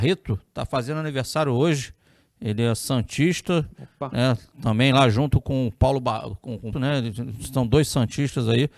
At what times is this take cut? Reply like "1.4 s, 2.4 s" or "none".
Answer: 6.7 s